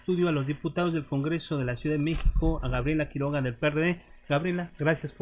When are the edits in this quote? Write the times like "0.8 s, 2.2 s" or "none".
none